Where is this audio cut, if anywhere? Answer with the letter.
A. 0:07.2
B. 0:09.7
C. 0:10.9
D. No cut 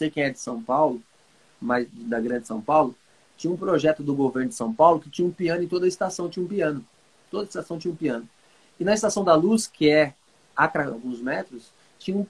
C